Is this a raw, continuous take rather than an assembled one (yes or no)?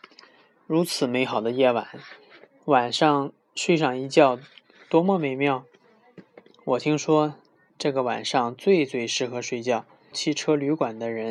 no